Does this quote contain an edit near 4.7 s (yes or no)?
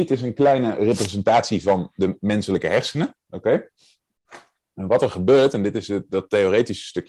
no